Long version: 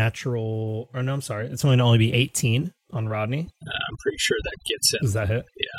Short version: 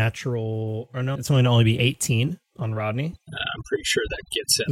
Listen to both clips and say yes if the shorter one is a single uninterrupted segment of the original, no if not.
no